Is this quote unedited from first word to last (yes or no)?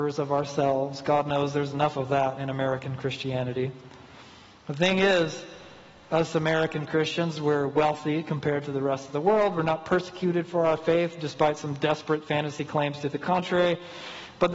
yes